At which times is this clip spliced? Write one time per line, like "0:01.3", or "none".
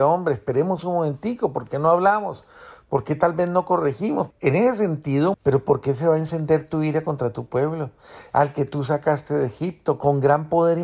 0:04.3
0:05.3

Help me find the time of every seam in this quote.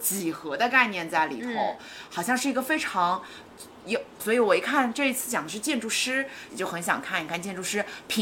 0:04.2
0:06.5

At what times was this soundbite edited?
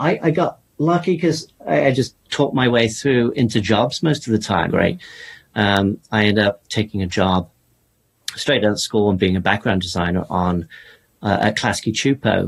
0:04.7

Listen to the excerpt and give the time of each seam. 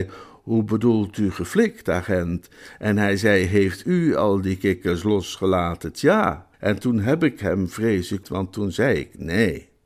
0:06.5
0:08.2

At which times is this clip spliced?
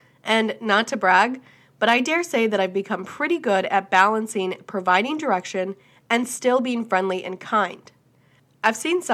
none

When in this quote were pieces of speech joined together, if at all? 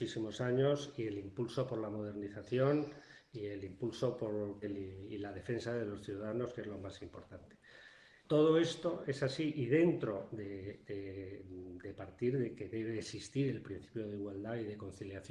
0:04.6
0:08.2

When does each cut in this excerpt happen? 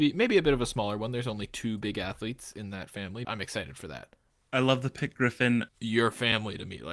0:03.2
0:05.7

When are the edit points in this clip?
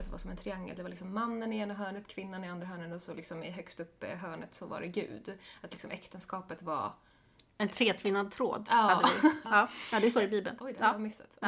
0:09.4
0:10.6

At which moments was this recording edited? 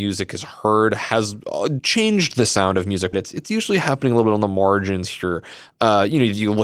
0:01.8
0:03.1

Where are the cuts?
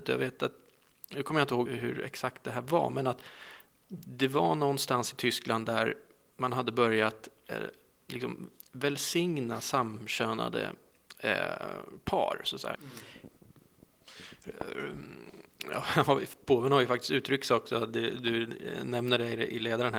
0:01.7
0:12.7

